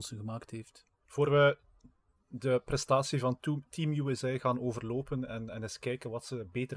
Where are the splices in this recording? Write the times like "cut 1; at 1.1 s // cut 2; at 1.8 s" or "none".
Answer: cut 1; at 1.0 s